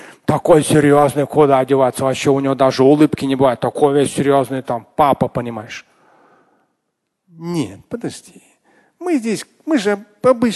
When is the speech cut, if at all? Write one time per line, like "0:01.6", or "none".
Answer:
0:04.1